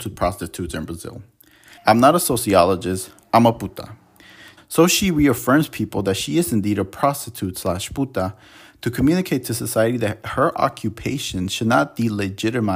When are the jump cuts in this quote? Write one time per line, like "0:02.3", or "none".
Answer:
0:01.8
0:04.6

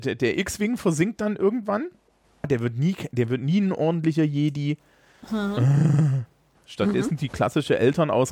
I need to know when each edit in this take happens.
0:02.4
0:06.6

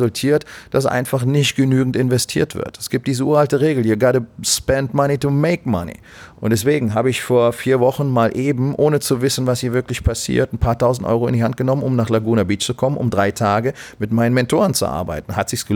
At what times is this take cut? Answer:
0:06.3

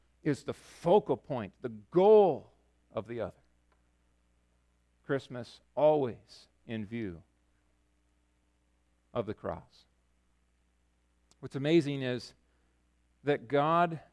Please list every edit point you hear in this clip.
none

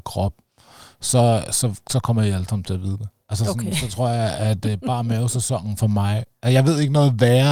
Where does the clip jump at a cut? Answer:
none

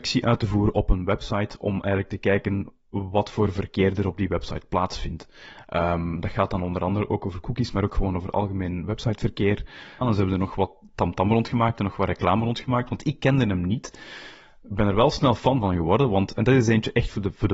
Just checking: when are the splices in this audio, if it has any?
0:10.0

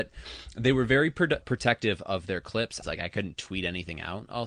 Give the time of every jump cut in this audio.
0:01.4
0:02.8

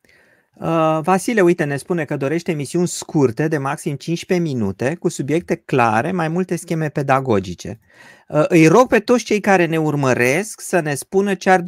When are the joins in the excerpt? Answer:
none

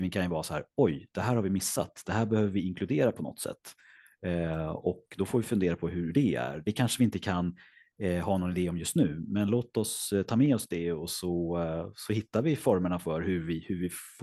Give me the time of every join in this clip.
none

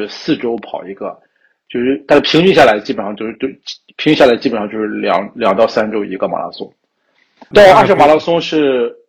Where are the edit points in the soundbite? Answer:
0:07.5

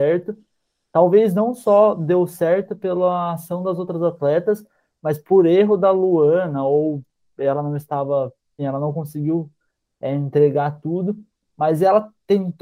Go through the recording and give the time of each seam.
0:08.6

